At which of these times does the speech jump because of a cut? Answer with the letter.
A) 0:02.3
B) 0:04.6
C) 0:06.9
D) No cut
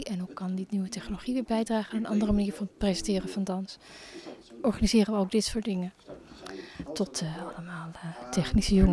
C